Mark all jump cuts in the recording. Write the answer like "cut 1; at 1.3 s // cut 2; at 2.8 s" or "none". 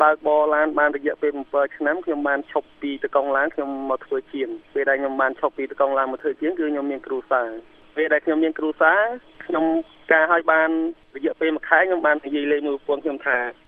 cut 1; at 4.7 s // cut 2; at 12.2 s